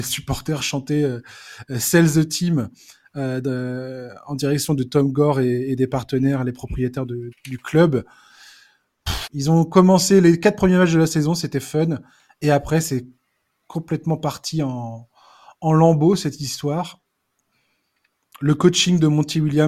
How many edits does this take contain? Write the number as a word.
two